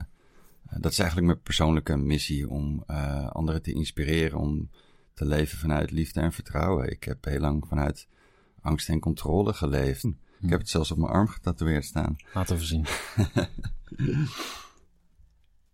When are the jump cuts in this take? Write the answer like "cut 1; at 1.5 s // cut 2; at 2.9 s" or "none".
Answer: cut 1; at 10.0 s